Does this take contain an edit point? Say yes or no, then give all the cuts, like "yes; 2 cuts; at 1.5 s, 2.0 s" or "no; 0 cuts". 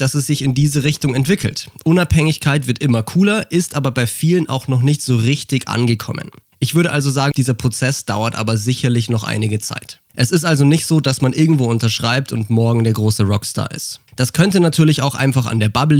yes; 3 cuts; at 7.3 s, 10.1 s, 14.1 s